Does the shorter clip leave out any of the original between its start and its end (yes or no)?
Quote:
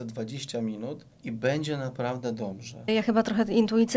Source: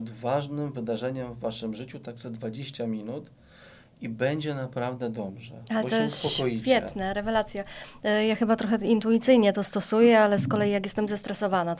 yes